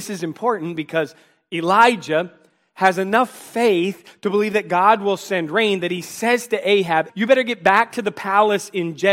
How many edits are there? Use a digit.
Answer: 1